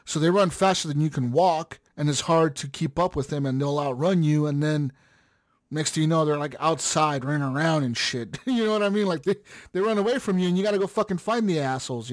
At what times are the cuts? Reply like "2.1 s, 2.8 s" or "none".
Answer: 1.9 s